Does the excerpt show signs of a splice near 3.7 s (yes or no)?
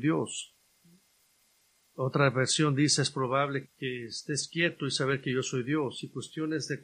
yes